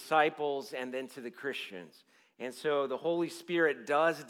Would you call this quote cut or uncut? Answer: uncut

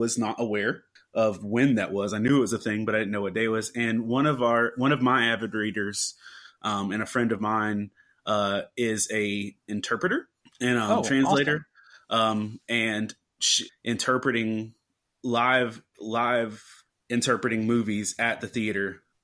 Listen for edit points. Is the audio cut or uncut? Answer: cut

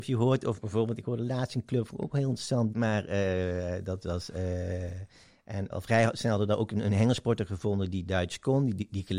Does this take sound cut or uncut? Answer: cut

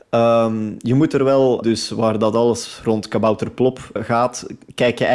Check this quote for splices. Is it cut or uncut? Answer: cut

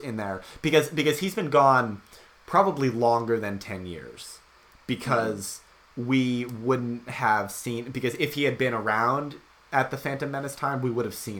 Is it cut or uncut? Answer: uncut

